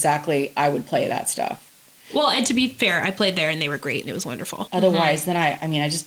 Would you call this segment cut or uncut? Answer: cut